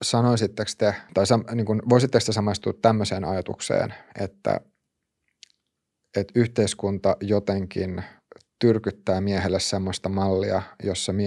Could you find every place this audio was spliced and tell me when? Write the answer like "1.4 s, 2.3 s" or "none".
1.1 s